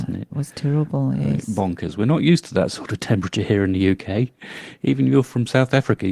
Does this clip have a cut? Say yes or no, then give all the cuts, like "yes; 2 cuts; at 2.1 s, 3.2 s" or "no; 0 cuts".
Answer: no; 0 cuts